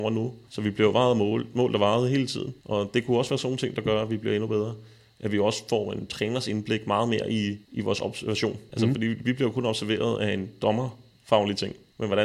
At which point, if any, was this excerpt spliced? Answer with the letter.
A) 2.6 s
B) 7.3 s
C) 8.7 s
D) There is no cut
C